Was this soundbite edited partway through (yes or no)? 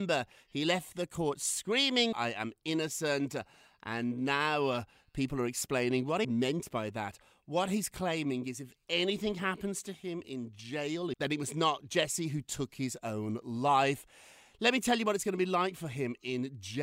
yes